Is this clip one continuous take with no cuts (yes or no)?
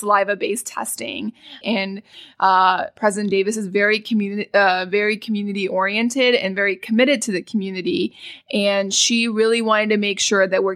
no